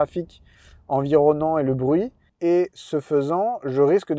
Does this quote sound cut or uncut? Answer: cut